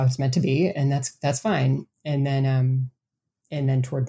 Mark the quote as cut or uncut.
uncut